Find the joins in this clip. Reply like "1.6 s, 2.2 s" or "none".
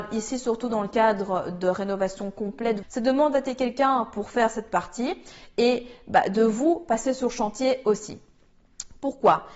2.8 s